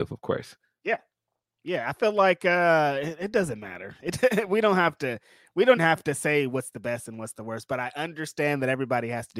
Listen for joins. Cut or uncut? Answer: cut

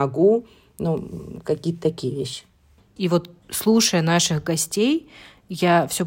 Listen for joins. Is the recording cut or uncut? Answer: cut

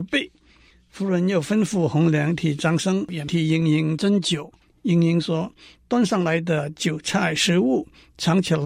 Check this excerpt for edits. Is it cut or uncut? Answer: uncut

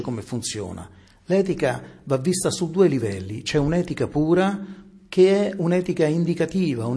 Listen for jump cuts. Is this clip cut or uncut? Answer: uncut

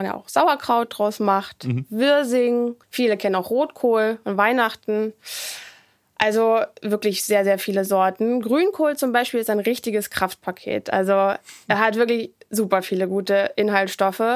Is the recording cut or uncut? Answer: cut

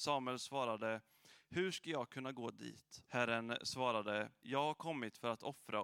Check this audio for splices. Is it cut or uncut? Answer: cut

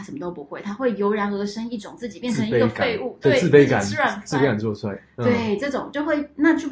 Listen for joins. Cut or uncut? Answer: uncut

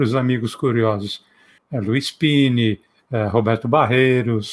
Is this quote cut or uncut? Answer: cut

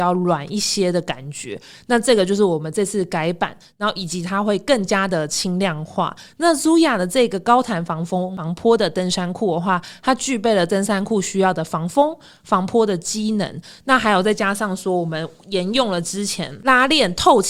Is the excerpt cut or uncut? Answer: uncut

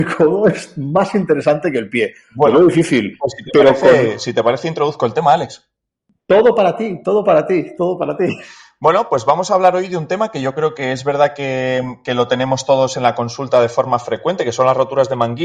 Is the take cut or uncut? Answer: uncut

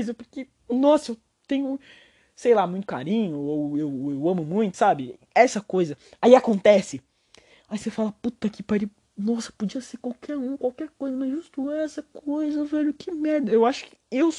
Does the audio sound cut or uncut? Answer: cut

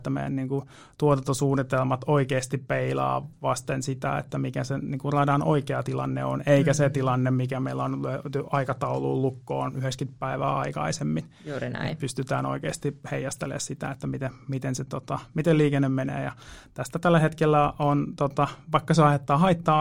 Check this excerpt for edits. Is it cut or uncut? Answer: uncut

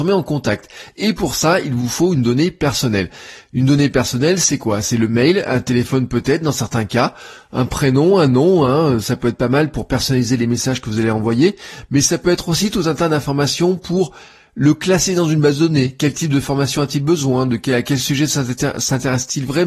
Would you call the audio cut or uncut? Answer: uncut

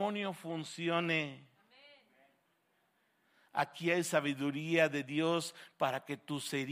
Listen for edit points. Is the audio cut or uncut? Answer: uncut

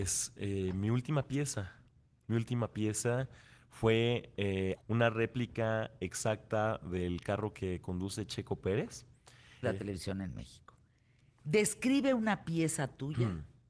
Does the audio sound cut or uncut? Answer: cut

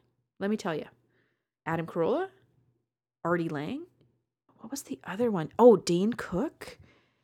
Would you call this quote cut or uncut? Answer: cut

